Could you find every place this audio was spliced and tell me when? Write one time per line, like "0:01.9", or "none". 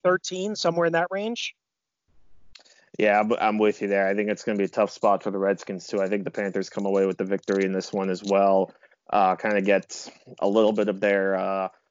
none